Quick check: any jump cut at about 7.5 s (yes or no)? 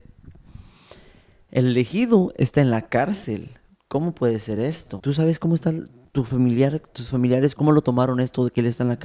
yes